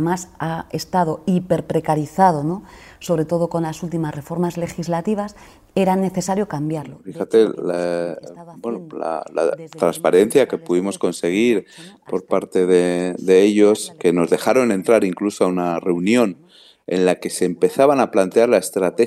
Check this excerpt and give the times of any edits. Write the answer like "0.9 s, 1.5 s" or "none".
none